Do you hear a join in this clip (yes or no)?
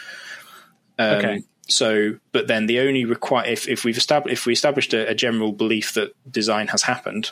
no